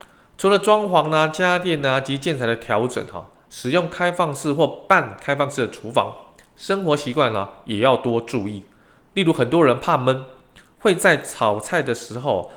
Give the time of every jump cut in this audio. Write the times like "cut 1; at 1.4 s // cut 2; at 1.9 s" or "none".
none